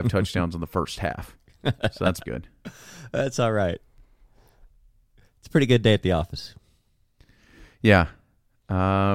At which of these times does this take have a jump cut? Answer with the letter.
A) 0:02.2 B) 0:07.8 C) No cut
A